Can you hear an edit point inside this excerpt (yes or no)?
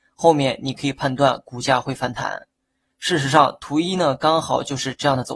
no